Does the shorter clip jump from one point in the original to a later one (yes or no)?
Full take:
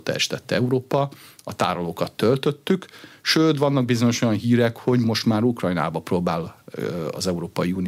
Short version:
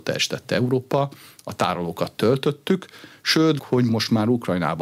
yes